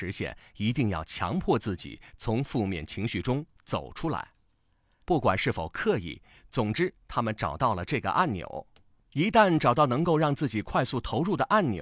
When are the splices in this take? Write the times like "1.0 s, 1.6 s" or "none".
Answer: 5.0 s